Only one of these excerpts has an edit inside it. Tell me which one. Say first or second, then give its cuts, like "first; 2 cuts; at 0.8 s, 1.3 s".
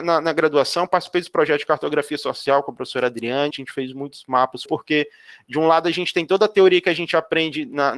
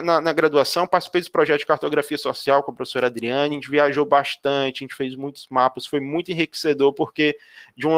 first; 2 cuts; at 3.5 s, 4.6 s